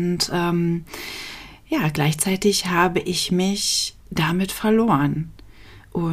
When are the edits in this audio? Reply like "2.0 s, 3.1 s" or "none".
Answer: 4.0 s